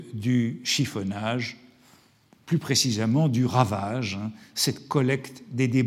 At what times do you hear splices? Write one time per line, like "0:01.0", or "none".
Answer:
none